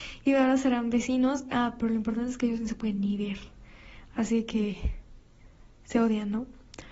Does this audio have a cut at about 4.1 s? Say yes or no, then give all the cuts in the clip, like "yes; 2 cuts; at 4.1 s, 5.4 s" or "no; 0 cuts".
no; 0 cuts